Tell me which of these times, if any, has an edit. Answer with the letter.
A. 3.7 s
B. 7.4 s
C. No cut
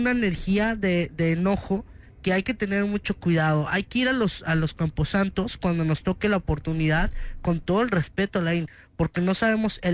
C